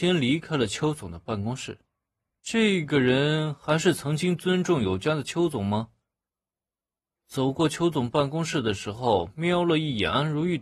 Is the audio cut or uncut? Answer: cut